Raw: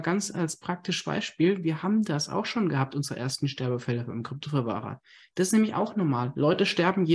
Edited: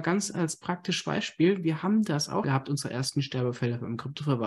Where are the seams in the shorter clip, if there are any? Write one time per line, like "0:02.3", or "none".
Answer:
0:02.4